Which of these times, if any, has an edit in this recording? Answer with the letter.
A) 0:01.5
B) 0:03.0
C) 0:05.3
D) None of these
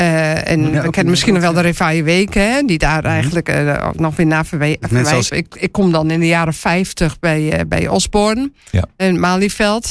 C